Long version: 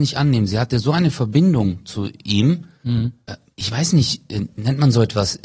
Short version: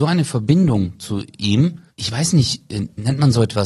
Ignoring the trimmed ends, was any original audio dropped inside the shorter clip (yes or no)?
yes